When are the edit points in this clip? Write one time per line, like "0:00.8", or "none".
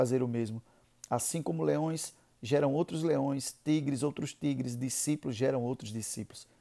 none